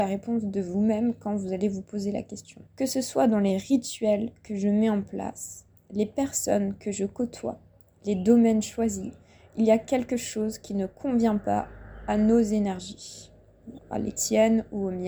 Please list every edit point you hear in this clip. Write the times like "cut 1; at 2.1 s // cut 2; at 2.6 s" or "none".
cut 1; at 2.7 s // cut 2; at 13.8 s